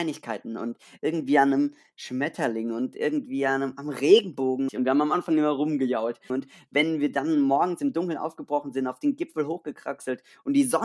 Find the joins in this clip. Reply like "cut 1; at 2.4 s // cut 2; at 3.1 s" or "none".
cut 1; at 4.7 s // cut 2; at 6.3 s